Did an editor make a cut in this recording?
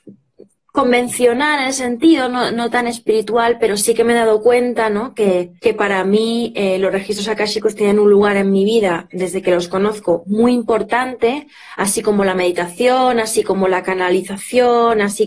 yes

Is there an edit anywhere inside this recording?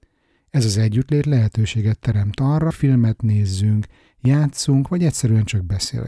yes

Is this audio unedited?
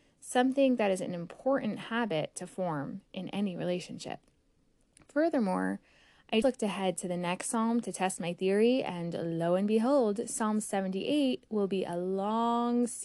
no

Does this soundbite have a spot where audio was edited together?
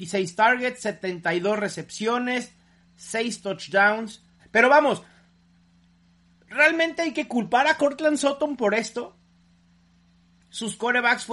yes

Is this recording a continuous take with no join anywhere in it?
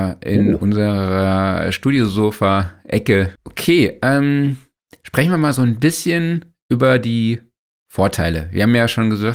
no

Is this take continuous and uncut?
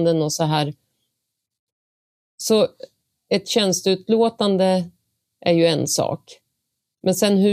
yes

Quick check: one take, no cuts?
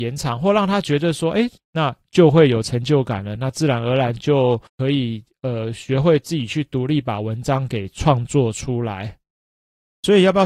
no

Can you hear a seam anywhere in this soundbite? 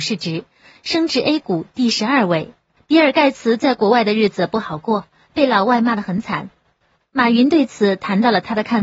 yes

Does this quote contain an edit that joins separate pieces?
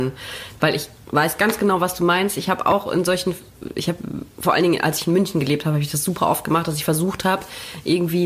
no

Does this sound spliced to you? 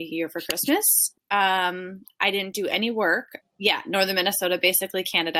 yes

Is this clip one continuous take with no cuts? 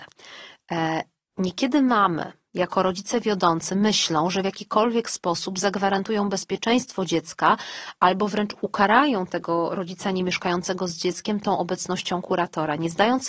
yes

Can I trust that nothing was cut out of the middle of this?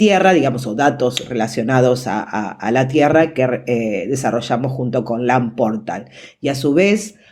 yes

